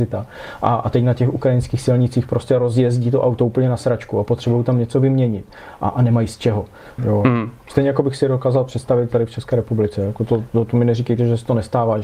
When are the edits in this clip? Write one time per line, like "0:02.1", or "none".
0:07.0